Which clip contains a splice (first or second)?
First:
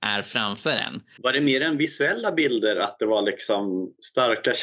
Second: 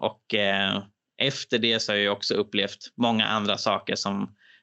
first